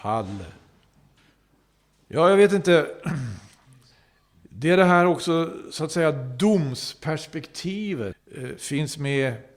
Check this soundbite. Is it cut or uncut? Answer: uncut